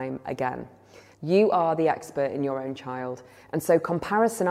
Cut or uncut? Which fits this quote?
cut